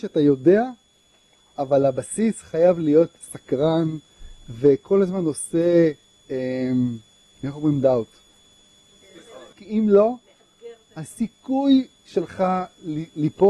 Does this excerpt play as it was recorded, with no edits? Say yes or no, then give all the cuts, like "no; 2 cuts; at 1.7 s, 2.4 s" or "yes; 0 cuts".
no; 1 cut; at 9.5 s